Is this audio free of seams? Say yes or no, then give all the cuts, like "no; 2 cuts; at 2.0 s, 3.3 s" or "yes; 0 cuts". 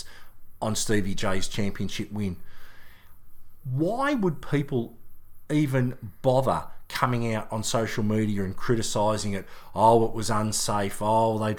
yes; 0 cuts